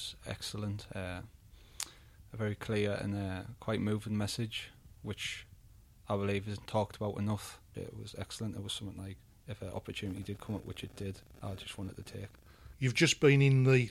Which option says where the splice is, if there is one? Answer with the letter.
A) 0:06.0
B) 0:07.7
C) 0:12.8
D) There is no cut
B